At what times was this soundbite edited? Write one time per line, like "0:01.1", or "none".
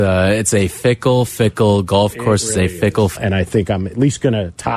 0:03.2